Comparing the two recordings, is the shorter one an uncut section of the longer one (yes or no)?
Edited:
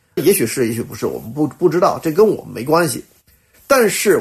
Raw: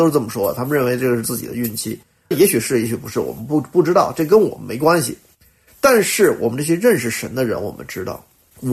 yes